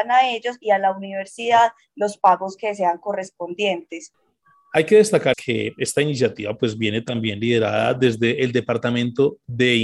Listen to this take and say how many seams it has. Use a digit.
1